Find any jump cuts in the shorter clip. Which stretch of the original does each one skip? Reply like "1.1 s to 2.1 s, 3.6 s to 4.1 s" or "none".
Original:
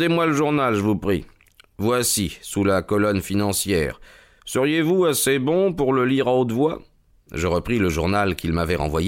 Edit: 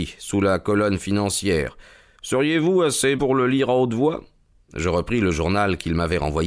5.4 s to 5.7 s